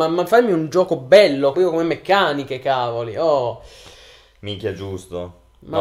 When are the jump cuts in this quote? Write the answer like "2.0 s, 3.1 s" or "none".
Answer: 1.5 s